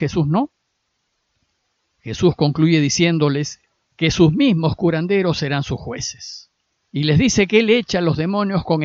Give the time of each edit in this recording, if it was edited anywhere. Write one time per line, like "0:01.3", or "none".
0:06.8